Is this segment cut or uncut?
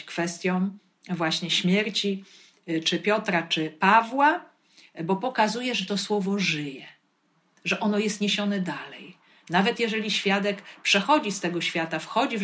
uncut